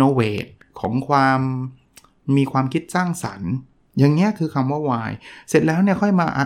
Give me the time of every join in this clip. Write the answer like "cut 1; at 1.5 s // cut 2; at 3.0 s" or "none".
none